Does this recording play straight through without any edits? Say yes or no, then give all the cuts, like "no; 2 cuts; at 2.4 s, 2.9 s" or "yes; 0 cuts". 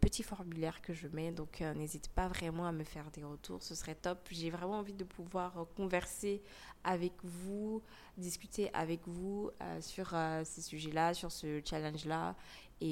yes; 0 cuts